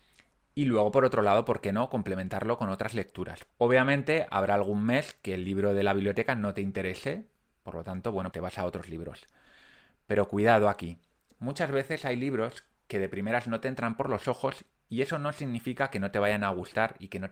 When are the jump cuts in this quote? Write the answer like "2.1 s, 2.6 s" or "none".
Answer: 3.5 s, 8.3 s